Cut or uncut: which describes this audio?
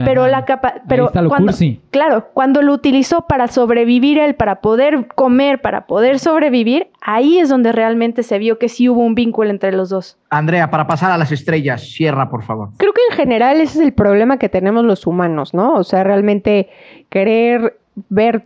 uncut